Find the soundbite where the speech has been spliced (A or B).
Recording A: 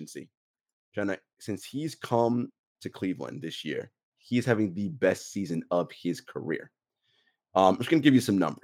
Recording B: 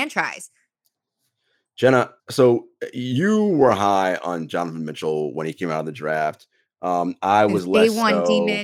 B